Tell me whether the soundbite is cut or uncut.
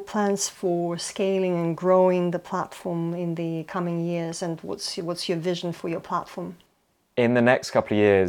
uncut